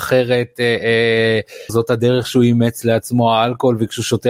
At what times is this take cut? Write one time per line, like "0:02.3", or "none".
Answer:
0:01.7